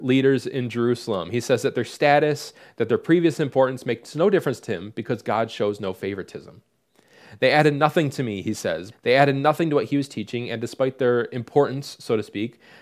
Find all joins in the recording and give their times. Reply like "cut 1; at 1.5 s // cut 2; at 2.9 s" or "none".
cut 1; at 8.9 s